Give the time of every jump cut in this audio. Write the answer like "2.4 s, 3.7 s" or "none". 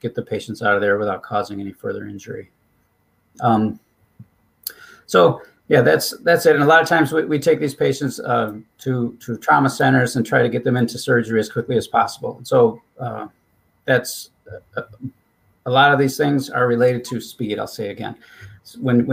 none